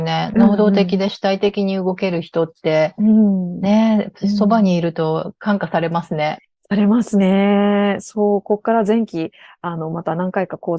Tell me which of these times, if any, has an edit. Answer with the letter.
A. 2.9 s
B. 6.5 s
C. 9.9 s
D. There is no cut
D